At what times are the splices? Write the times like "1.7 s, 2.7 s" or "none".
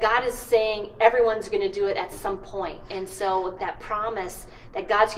3.6 s